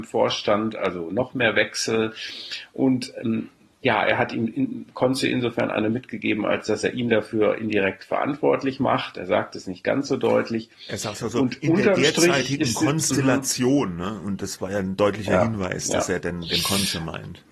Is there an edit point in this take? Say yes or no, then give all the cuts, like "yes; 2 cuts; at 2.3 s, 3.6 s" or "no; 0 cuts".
no; 0 cuts